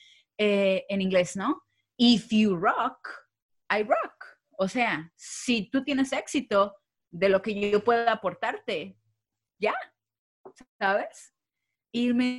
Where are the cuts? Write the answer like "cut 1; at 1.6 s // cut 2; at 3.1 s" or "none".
none